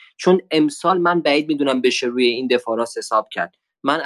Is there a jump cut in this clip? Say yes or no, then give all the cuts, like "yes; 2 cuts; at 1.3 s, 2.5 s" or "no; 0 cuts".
no; 0 cuts